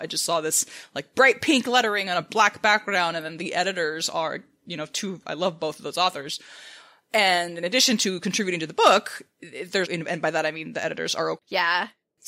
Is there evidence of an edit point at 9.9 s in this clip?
yes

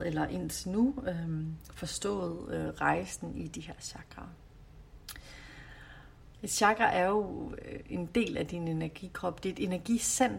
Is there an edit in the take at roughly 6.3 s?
yes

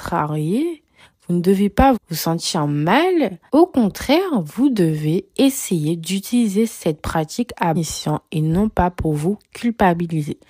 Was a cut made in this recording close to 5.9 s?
no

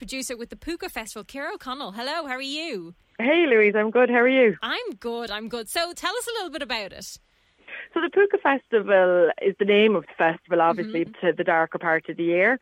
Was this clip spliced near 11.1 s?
yes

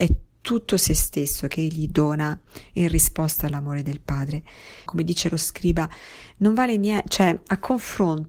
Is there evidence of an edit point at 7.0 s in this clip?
no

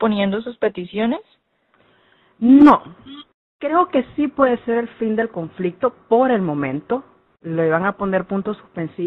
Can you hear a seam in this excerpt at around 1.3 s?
no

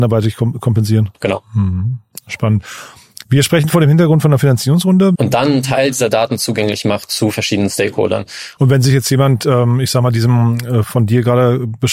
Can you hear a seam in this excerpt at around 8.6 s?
yes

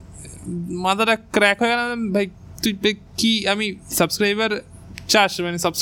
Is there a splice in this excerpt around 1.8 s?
no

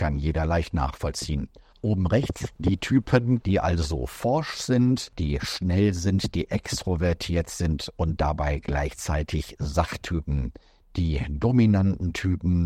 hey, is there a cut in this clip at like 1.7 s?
yes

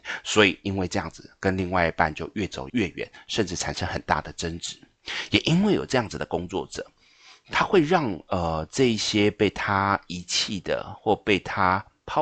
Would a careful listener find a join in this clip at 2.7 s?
yes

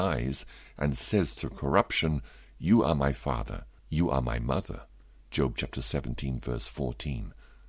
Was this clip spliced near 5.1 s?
no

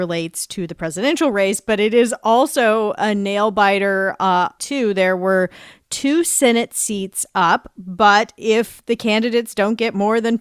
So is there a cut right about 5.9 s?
no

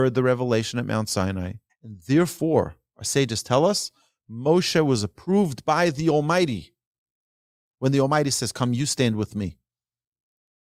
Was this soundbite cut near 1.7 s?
yes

